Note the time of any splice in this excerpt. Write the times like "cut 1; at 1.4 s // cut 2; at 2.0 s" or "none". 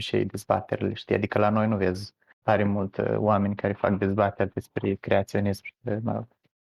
cut 1; at 2.4 s